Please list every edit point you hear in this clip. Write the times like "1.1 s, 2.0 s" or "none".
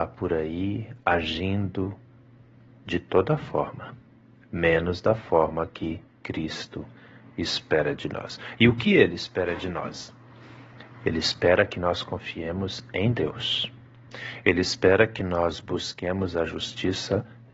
none